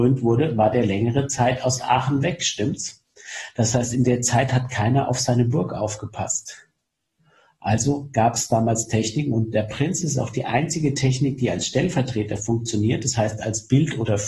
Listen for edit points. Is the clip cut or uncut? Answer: uncut